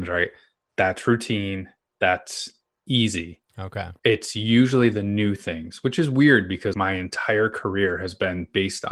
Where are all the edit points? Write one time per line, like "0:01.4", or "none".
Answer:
0:04.0
0:06.7